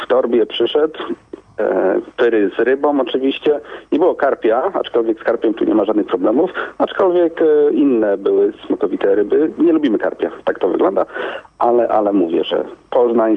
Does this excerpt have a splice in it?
no; 0 cuts

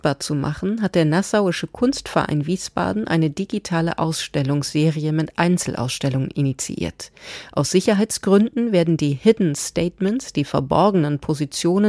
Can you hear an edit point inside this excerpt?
no; 0 cuts

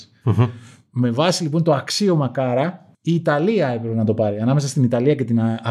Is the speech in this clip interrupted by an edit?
yes; 1 cut; at 2.9 s

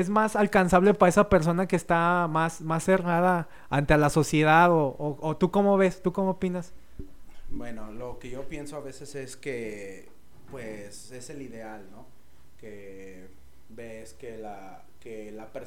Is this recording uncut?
yes; 0 cuts

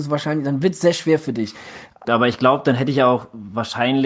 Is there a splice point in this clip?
yes; 1 cut; at 2.0 s

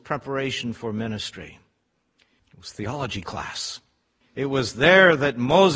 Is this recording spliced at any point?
yes; 2 cuts; at 2.4 s, 4.2 s

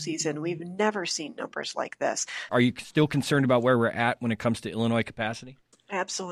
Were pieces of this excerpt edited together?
yes; 1 cut; at 2.5 s

